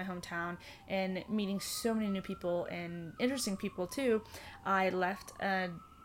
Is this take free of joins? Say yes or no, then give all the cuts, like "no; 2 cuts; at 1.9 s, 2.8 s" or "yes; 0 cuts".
no; 1 cut; at 3.2 s